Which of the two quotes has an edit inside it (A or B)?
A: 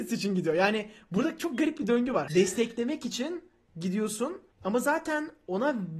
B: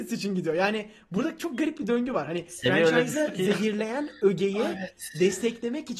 A